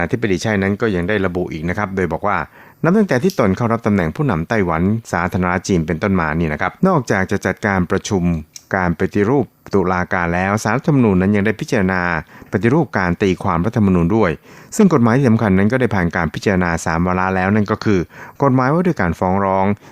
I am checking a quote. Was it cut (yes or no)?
yes